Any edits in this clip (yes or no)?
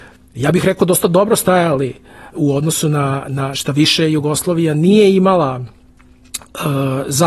yes